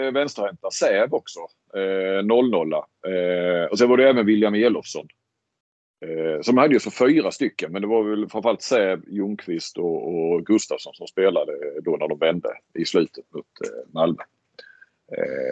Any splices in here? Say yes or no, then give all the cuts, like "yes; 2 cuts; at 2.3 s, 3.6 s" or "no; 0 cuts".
no; 0 cuts